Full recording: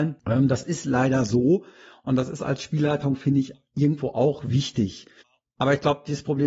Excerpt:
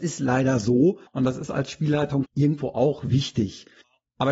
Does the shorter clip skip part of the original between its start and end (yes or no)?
yes